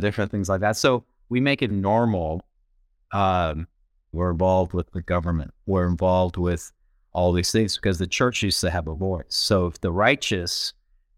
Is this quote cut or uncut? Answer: cut